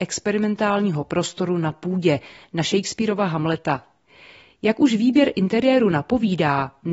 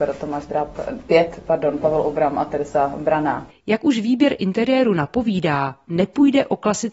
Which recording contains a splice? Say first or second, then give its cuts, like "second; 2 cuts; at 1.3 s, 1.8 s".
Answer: second; 1 cut; at 3.5 s